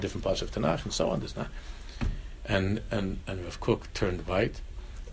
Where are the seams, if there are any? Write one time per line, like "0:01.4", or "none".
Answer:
none